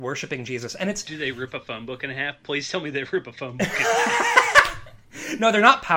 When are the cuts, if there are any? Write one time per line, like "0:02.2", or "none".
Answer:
none